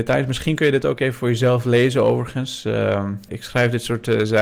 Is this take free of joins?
no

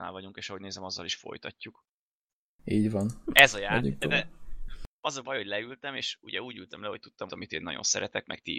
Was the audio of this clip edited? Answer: yes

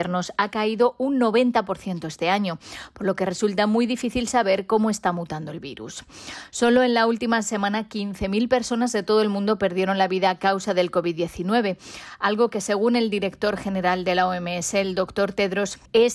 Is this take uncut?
yes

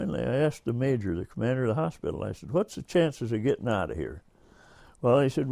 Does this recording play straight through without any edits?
yes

